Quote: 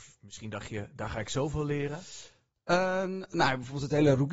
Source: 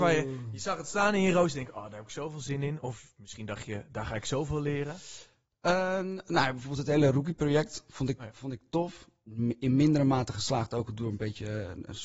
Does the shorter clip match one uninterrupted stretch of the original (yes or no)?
yes